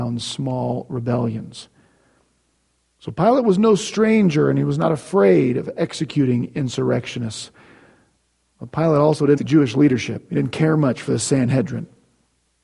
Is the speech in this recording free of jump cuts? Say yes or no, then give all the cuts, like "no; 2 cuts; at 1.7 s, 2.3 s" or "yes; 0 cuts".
no; 1 cut; at 9.4 s